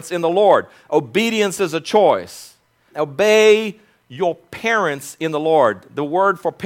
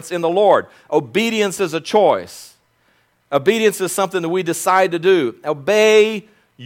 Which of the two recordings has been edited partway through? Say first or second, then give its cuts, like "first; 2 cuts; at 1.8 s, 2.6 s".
first; 1 cut; at 2.9 s